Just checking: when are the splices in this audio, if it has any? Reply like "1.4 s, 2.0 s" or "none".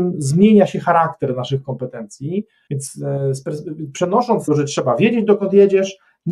2.7 s, 4.5 s